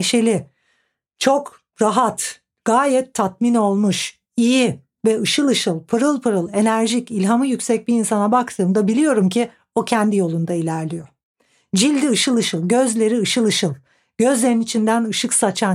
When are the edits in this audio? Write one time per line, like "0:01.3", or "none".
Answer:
none